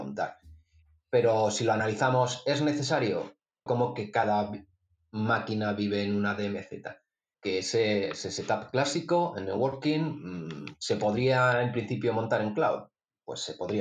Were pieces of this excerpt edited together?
yes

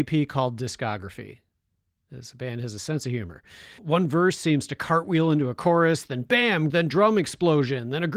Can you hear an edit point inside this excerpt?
yes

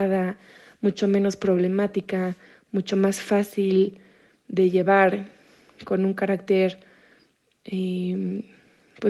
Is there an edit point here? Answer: no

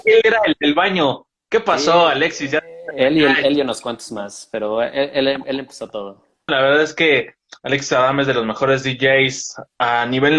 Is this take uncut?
no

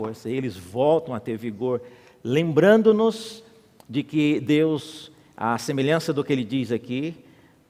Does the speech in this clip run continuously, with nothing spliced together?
yes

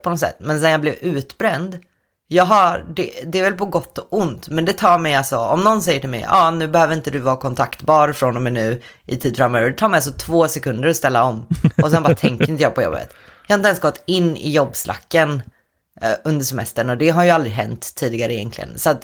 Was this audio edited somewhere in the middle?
no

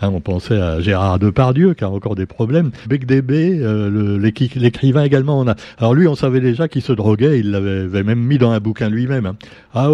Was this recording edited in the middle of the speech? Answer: yes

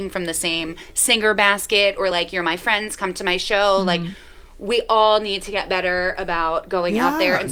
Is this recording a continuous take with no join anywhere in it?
yes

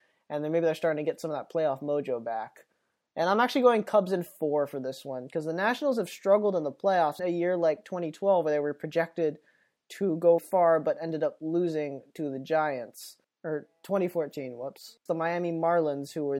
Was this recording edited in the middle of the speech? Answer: yes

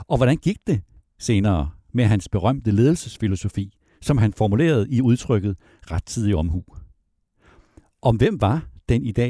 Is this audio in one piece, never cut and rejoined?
yes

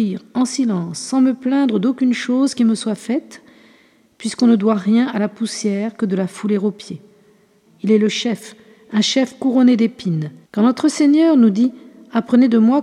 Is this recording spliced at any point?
yes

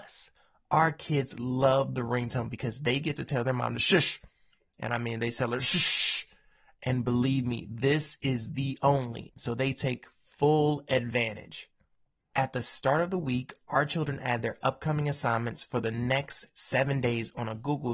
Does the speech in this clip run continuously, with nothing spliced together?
no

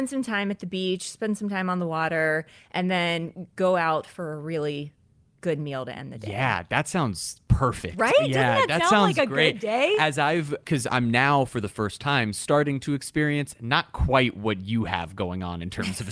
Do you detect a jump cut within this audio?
no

